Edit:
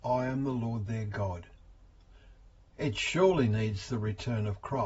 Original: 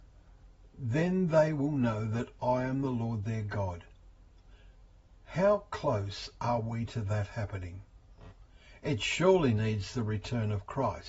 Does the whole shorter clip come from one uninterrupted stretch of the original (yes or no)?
no